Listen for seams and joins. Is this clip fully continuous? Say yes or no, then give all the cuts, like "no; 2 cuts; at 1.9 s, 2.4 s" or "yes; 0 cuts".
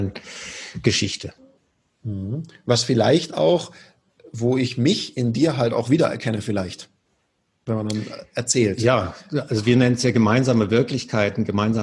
yes; 0 cuts